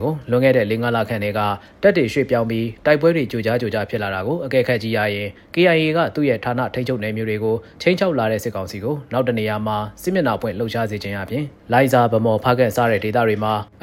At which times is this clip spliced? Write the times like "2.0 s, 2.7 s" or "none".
none